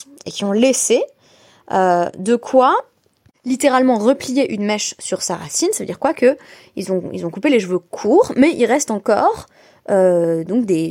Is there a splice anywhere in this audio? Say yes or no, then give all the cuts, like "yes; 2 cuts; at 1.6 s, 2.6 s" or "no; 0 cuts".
no; 0 cuts